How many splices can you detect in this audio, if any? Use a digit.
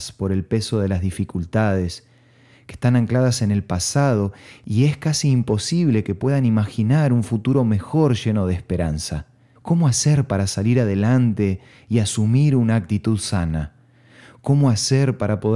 1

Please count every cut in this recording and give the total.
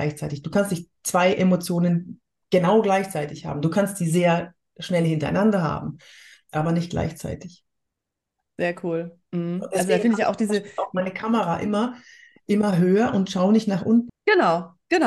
1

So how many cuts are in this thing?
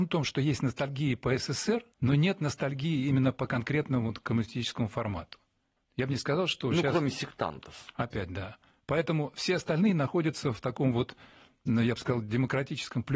1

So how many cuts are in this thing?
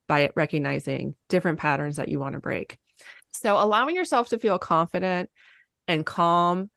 1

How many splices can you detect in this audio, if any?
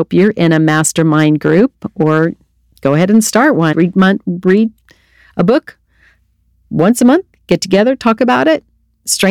1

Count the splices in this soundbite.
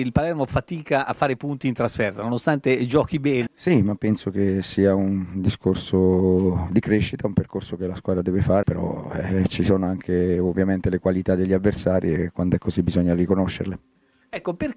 2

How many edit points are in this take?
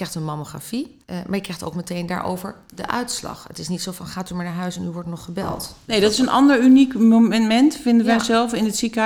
1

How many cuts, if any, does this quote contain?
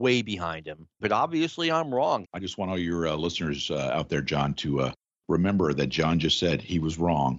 2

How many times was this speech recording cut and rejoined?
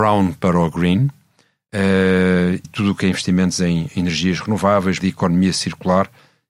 2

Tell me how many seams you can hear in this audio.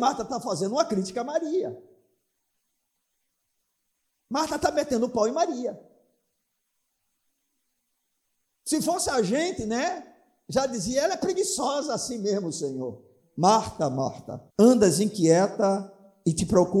2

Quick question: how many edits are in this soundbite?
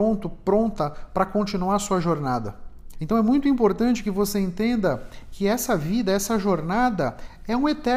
1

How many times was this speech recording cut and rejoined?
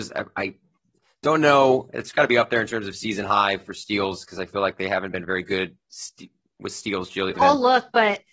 1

